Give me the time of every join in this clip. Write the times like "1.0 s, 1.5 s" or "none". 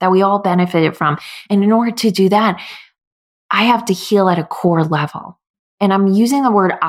none